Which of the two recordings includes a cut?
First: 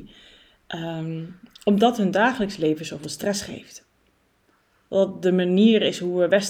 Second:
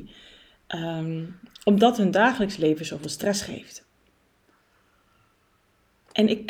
first; 1 cut; at 4.9 s

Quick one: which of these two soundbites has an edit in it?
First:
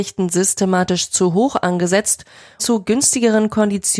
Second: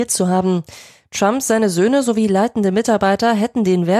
first; 1 cut; at 2.6 s

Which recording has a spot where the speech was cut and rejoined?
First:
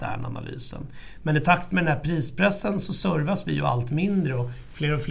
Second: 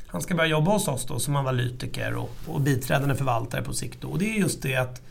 second; 1 cut; at 2.5 s

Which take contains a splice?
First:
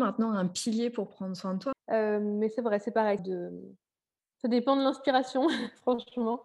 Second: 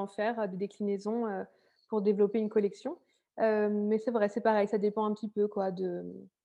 first; 2 cuts; at 1.7 s, 3.2 s

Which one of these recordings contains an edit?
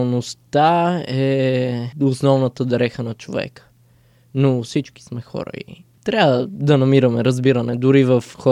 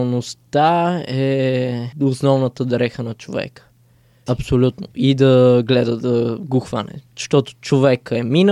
second; 1 cut; at 4.3 s

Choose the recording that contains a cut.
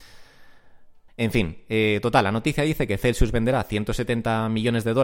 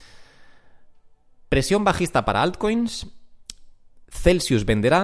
first; 1 cut; at 1.1 s

